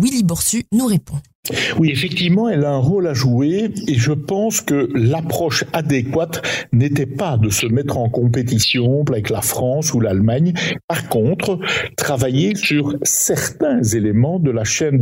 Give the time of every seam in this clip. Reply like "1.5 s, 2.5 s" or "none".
9.1 s